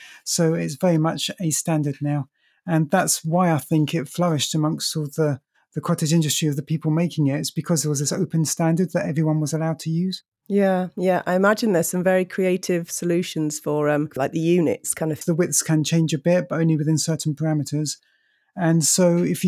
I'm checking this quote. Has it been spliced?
yes; 2 cuts; at 14.2 s, 15.2 s

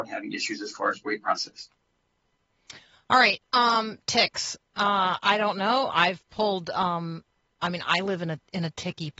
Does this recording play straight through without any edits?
yes; 0 cuts

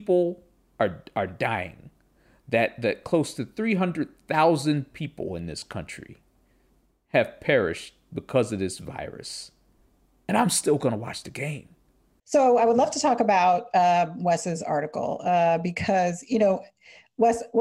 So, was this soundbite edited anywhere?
no; 0 cuts

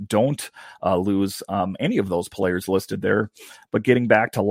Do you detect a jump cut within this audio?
no; 0 cuts

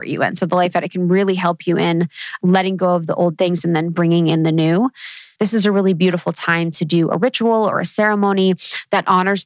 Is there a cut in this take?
yes; 1 cut; at 5.4 s

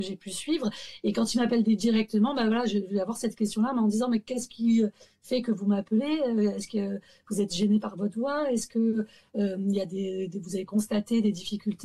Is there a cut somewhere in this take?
no; 0 cuts

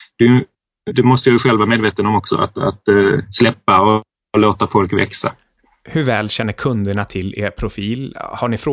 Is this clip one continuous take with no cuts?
no; 1 cut; at 0.9 s

